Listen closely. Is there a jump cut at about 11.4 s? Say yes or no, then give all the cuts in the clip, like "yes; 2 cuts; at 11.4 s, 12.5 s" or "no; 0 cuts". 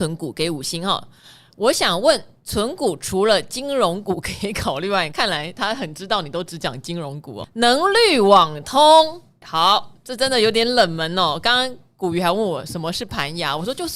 no; 3 cuts; at 5.1 s, 7.4 s, 9.4 s